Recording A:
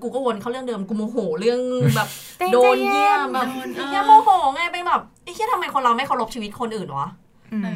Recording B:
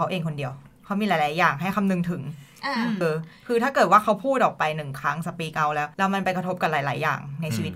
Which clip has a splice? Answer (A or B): B